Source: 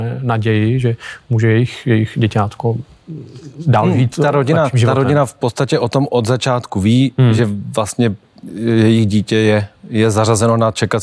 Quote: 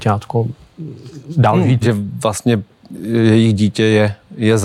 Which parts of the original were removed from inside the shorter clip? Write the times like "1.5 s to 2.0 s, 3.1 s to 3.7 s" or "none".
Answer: 4.1 s to 7.3 s